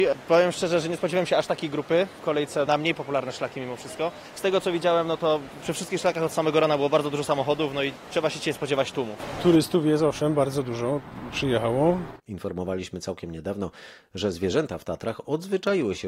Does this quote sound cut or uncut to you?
cut